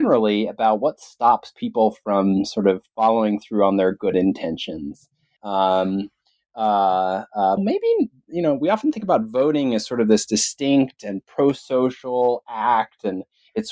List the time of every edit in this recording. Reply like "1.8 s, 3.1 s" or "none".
5.4 s, 7.6 s